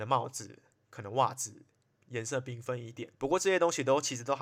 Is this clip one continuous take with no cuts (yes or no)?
no